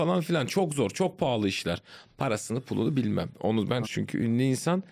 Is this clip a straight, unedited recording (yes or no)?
no